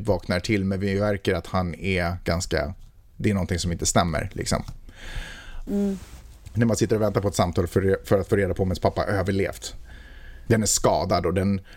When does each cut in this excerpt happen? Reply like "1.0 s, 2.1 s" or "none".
5.7 s, 10.5 s